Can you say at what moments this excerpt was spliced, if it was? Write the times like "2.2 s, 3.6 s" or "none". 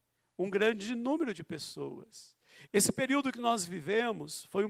2.7 s

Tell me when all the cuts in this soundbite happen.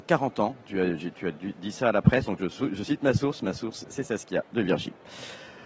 2.3 s

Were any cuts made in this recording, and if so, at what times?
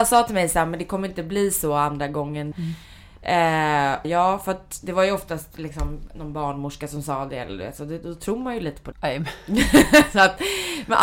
2.5 s, 4.0 s, 8.9 s

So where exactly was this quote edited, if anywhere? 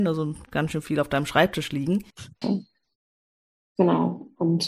2.4 s

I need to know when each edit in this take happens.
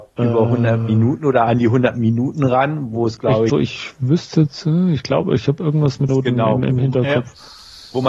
3.5 s, 6.1 s

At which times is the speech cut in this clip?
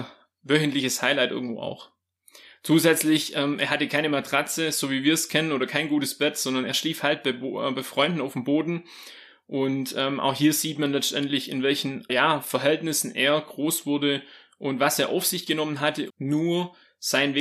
12.1 s, 16.1 s

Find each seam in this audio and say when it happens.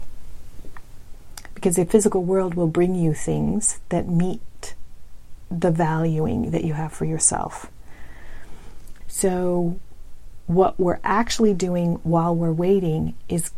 9.0 s

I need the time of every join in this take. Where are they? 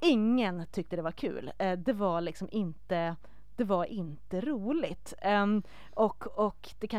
none

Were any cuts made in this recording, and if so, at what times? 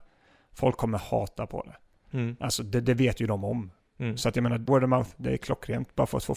4.7 s

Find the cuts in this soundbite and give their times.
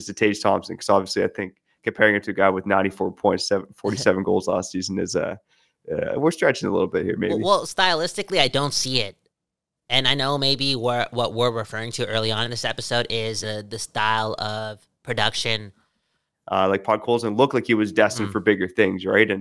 13.4 s, 16.3 s

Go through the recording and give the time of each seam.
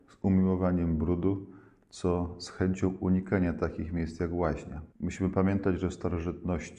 4.9 s

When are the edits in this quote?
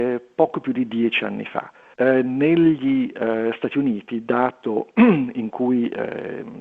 1.9 s

